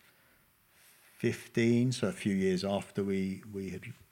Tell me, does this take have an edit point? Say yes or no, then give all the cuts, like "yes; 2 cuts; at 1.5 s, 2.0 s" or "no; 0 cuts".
no; 0 cuts